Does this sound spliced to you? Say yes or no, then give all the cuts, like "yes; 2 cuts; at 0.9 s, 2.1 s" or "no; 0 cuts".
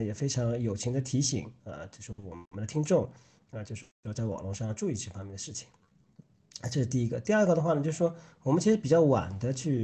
no; 0 cuts